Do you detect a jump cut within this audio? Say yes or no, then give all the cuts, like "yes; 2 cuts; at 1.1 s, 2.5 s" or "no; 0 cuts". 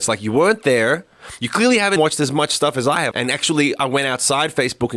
yes; 2 cuts; at 2.0 s, 3.1 s